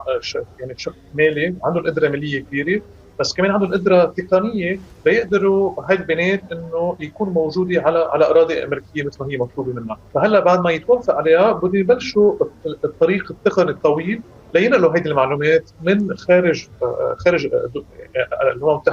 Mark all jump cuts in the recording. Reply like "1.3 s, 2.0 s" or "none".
10.1 s

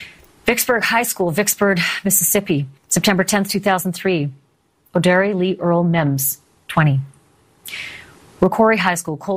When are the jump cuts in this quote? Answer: 2.8 s

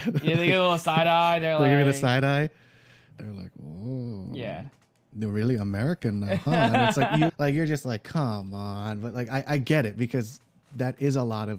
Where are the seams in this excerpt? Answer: 7.3 s

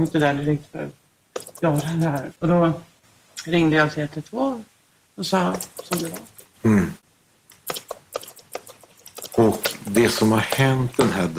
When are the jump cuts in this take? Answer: 2.3 s

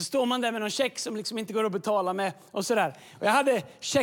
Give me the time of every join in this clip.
none

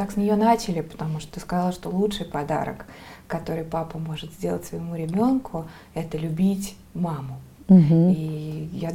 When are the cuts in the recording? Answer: none

